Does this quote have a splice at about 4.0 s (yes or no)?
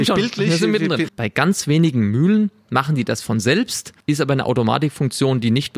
yes